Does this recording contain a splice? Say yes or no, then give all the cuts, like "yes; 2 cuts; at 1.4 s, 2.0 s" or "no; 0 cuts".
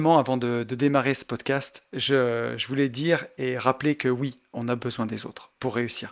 no; 0 cuts